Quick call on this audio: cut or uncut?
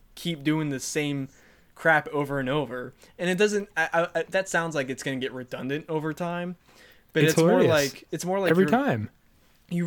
uncut